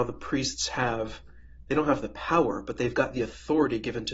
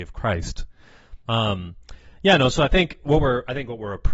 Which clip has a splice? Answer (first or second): second